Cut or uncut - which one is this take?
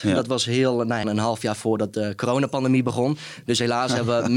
cut